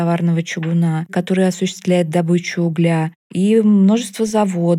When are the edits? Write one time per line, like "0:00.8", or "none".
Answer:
0:01.1
0:03.2